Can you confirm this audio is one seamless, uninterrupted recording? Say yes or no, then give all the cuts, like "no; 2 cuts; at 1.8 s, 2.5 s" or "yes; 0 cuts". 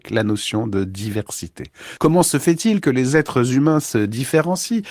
no; 1 cut; at 2.0 s